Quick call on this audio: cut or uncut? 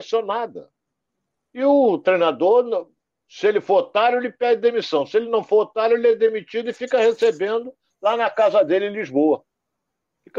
uncut